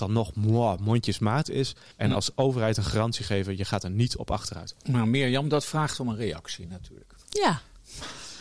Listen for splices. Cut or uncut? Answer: cut